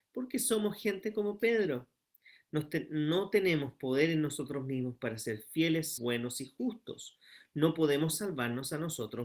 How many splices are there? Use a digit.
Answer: 1